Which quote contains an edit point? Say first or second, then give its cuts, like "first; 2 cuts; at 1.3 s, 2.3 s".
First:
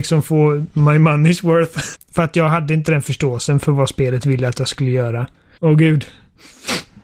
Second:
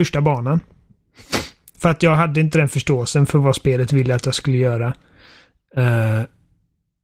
first; 2 cuts; at 1.9 s, 5.6 s